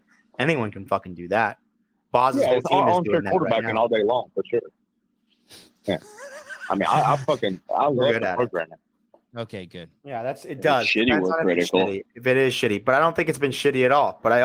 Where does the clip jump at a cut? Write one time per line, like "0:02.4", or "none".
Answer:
0:09.3